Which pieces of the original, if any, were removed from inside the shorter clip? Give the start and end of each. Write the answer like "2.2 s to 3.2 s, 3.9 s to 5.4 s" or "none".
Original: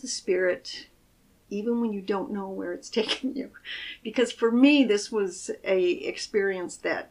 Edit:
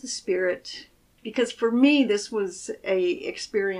1.2 s to 4.0 s